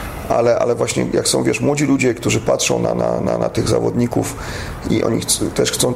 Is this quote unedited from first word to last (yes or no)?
yes